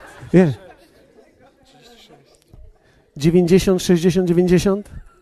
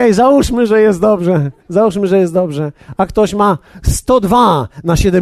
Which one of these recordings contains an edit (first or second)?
second